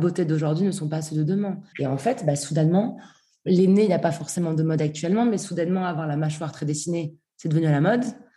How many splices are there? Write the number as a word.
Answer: one